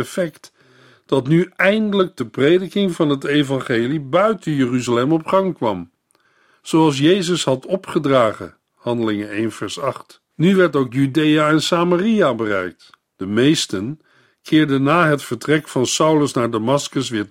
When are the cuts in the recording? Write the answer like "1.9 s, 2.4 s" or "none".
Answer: 10.3 s, 13.1 s